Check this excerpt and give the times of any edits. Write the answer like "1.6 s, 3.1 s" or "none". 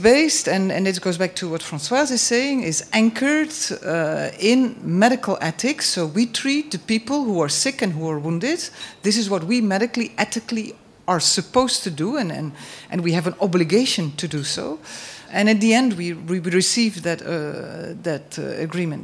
15.3 s, 17.0 s